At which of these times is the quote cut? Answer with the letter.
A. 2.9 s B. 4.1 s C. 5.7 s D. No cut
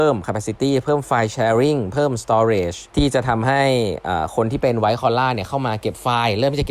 A